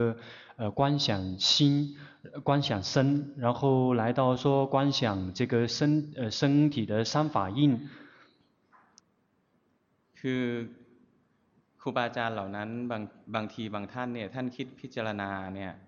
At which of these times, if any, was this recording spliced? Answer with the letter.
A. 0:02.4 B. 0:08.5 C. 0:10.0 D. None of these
D